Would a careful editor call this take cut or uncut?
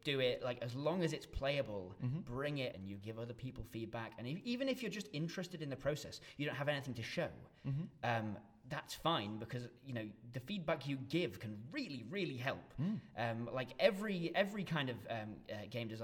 cut